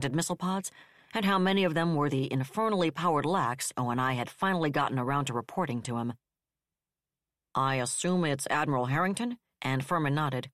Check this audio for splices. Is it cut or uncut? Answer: cut